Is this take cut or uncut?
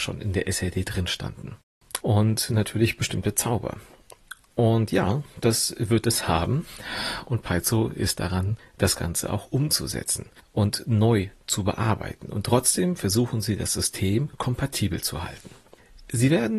cut